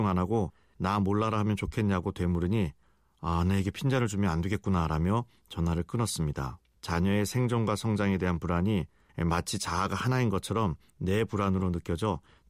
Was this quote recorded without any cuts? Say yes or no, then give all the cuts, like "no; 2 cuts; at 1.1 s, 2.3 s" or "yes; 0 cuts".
no; 1 cut; at 6.7 s